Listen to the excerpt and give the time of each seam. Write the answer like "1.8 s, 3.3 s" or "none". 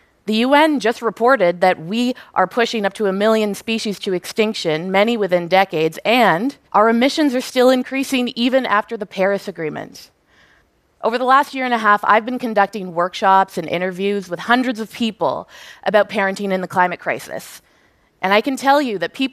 6.6 s